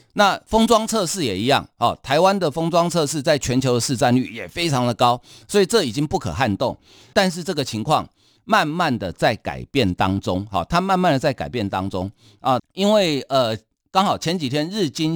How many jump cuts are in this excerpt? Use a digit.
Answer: 2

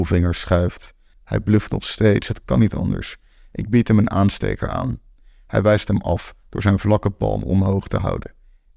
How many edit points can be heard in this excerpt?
1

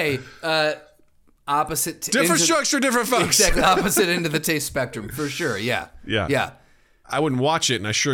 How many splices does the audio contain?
1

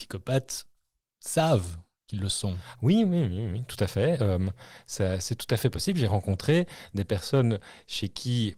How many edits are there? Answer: 0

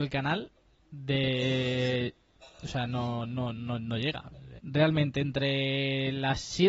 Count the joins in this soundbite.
1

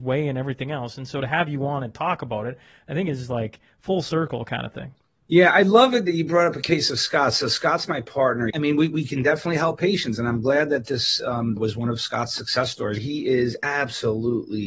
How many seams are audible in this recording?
3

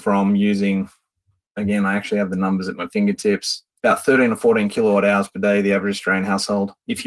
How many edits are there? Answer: 1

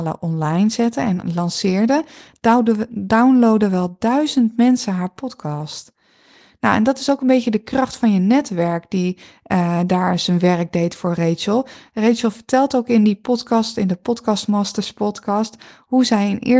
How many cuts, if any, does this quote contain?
0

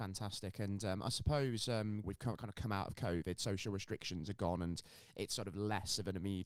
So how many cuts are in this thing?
1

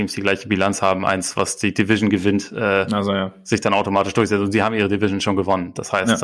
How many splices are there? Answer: 0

